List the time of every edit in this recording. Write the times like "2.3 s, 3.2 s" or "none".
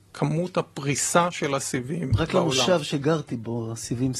none